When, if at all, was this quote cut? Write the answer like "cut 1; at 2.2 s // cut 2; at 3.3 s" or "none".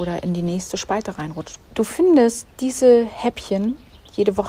cut 1; at 1.6 s